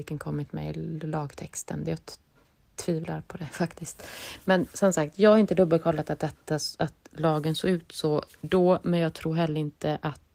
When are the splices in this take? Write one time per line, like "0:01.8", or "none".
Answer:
none